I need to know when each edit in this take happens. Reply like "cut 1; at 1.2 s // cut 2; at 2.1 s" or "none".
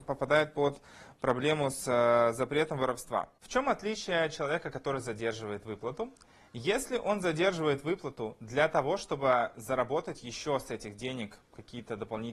none